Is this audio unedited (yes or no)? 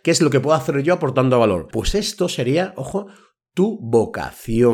no